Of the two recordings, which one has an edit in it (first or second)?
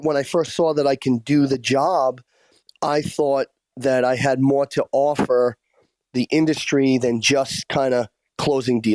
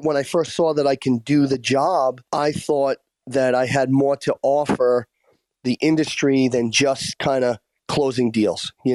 second